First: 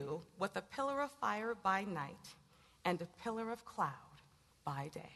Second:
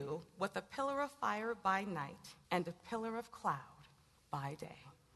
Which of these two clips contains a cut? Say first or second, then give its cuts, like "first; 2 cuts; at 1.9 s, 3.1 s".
second; 1 cut; at 2.4 s